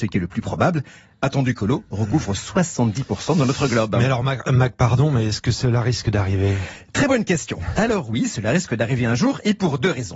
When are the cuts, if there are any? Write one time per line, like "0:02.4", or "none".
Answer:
none